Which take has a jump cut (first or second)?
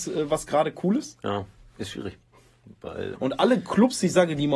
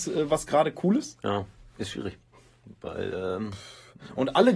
first